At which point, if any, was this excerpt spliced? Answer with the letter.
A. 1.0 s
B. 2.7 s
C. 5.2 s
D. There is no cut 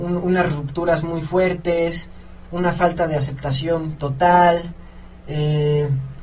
D